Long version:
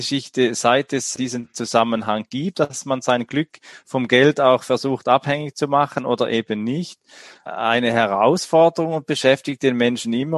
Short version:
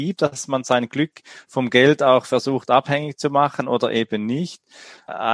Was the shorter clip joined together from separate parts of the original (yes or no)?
no